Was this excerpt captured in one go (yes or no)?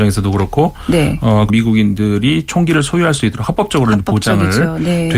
no